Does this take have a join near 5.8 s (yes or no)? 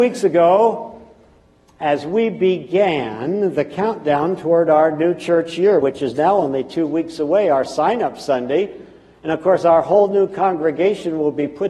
no